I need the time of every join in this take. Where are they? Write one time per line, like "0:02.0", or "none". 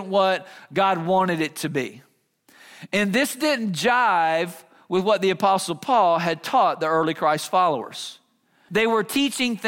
0:08.7

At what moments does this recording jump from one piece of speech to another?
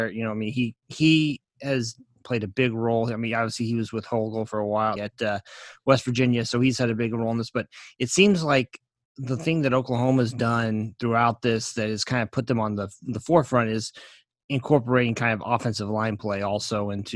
0:05.0

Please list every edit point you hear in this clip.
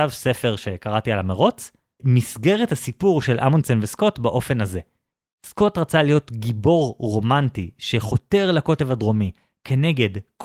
none

